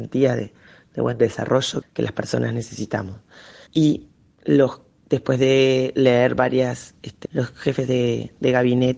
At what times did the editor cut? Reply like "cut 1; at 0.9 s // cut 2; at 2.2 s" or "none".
cut 1; at 1.8 s // cut 2; at 3.7 s // cut 3; at 7.3 s